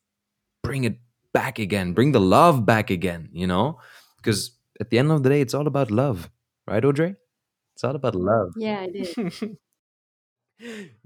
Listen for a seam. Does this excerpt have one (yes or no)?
no